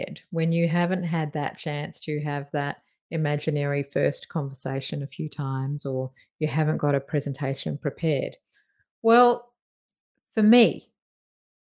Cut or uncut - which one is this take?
uncut